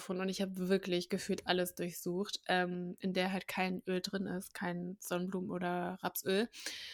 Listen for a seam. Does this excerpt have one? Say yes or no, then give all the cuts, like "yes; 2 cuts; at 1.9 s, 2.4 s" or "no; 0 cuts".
no; 0 cuts